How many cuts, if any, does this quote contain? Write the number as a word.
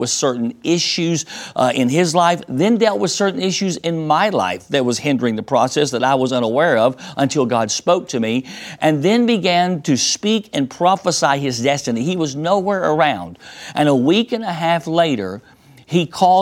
zero